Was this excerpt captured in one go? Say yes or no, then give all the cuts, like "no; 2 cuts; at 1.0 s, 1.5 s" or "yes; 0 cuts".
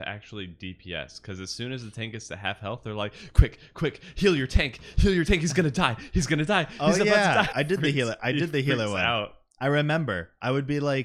no; 1 cut; at 7.5 s